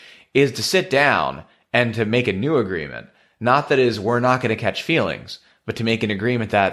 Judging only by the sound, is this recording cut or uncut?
uncut